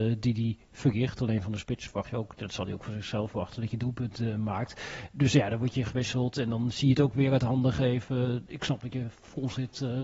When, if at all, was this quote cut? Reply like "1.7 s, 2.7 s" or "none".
none